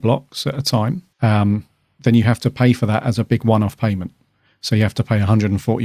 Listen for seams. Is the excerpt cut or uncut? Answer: cut